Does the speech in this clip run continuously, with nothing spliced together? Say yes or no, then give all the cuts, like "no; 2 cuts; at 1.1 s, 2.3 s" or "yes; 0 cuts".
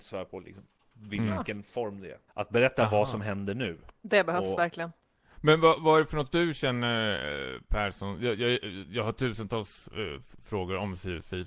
no; 1 cut; at 2.3 s